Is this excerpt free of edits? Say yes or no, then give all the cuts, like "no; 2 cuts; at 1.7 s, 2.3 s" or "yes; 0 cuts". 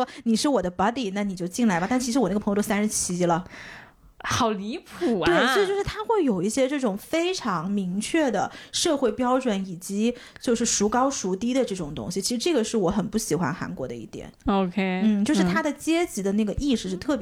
yes; 0 cuts